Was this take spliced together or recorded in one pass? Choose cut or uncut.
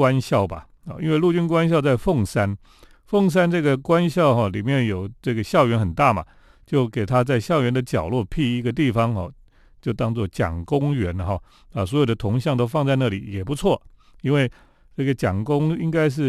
uncut